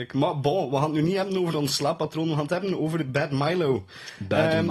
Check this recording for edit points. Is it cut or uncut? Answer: uncut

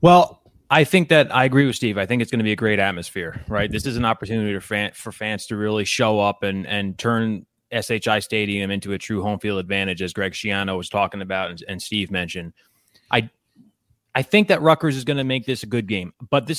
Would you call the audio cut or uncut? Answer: uncut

